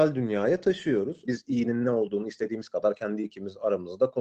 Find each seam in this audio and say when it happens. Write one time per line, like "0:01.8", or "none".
0:01.3

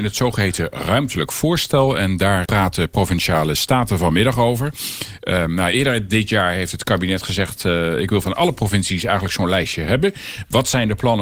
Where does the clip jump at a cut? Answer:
0:02.5

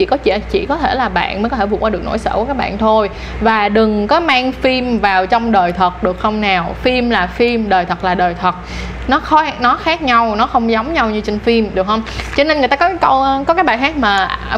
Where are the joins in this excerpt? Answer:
none

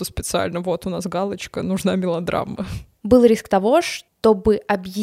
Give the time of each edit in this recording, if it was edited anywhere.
0:03.0

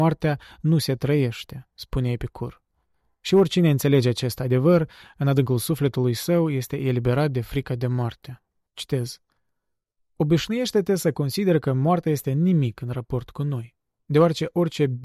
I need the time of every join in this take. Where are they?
0:08.7

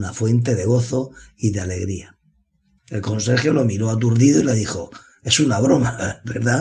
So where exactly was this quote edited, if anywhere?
0:02.8

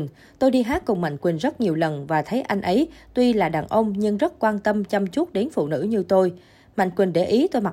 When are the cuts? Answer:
none

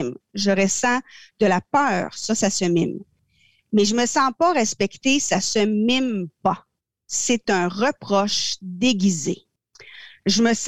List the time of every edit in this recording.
none

